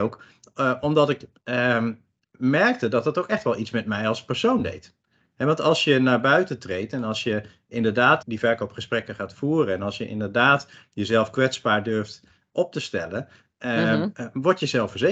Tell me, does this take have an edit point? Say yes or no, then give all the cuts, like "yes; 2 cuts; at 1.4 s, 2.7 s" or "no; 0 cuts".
yes; 1 cut; at 8.2 s